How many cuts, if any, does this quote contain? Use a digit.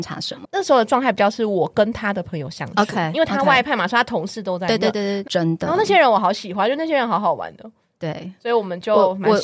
1